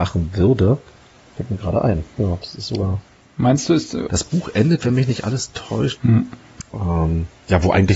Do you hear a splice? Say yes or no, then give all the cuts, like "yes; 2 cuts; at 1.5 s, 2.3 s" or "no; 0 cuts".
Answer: yes; 3 cuts; at 1.2 s, 4.1 s, 5.9 s